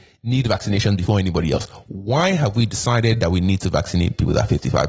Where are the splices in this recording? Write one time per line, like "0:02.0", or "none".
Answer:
none